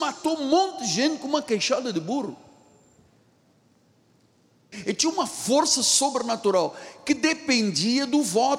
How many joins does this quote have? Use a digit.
1